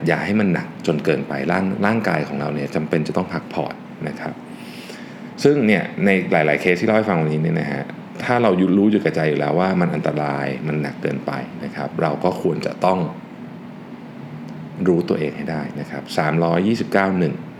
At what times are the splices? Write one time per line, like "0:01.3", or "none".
none